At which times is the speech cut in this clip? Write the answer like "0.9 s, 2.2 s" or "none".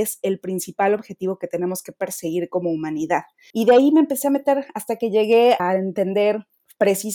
3.5 s, 5.6 s